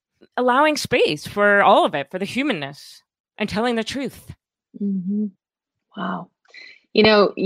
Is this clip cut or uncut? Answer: uncut